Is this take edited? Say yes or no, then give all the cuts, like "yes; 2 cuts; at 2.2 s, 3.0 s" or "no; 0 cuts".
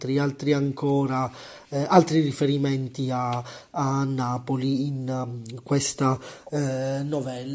no; 0 cuts